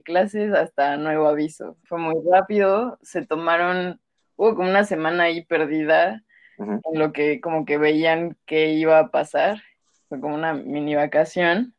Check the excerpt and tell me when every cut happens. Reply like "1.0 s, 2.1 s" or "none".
1.9 s, 6.8 s